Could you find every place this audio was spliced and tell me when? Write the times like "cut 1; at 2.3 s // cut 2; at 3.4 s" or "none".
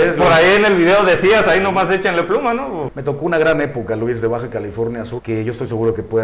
cut 1; at 2.9 s // cut 2; at 5.2 s